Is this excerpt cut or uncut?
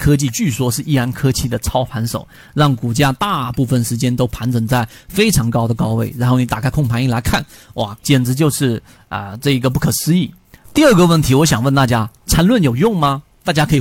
cut